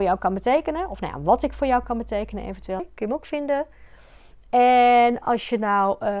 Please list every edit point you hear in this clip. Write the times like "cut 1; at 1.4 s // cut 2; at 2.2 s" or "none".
cut 1; at 2.8 s